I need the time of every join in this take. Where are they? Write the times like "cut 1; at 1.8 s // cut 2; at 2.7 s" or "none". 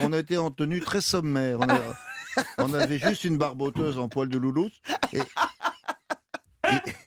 none